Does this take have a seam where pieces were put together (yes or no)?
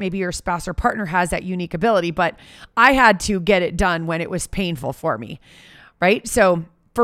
no